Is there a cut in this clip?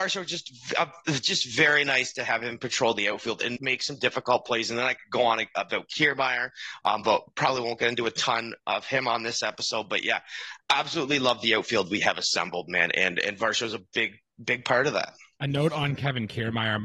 yes; 1 cut; at 3.6 s

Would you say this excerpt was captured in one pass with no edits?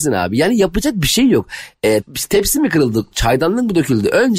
no; 2 cuts; at 2.0 s, 3.1 s

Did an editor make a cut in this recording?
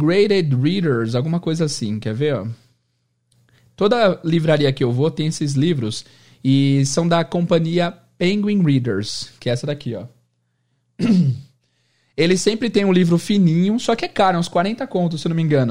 no; 0 cuts

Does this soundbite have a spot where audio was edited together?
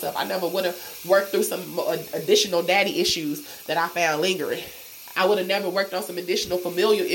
no; 0 cuts

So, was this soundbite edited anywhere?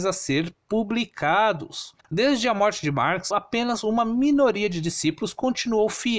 yes; 2 cuts; at 2.0 s, 3.3 s

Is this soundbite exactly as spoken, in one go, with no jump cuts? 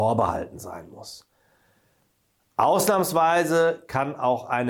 yes; 0 cuts

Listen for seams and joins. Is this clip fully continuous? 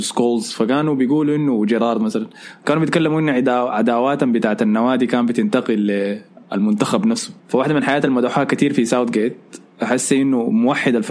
no; 1 cut; at 7.4 s

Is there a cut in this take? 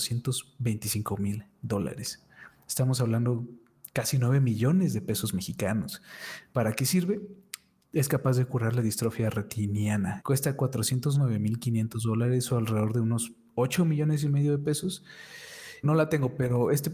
yes; 2 cuts; at 10.2 s, 15.8 s

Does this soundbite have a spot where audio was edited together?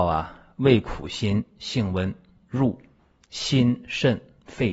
no; 0 cuts

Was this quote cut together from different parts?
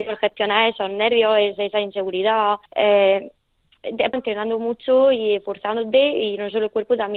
yes; 2 cuts; at 2.7 s, 4.1 s

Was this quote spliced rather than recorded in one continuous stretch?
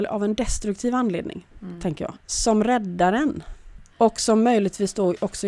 yes; 2 cuts; at 2.1 s, 3.9 s

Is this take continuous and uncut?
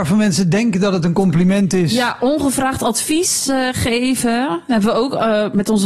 yes; 0 cuts

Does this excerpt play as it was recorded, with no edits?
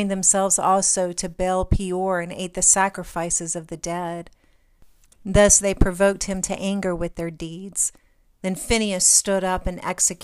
no; 1 cut; at 8.3 s

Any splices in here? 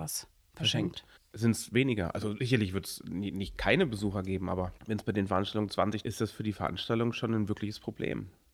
yes; 3 cuts; at 1.2 s, 4.8 s, 6.0 s

